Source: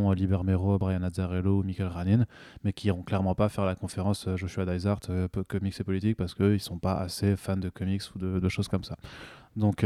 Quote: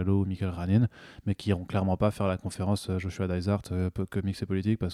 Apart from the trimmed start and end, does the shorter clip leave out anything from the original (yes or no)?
no